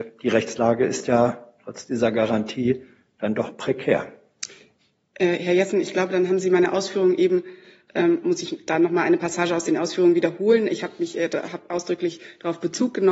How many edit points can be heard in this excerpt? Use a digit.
0